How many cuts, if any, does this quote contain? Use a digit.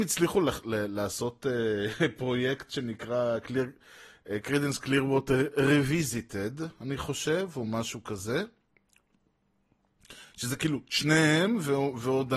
0